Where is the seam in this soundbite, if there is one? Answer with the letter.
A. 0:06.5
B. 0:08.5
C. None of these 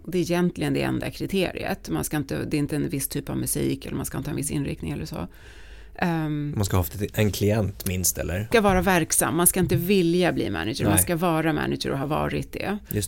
B